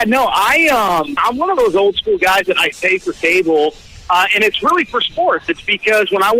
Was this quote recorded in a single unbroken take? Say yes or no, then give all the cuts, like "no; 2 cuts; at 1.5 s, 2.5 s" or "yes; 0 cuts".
no; 2 cuts; at 1.2 s, 2.7 s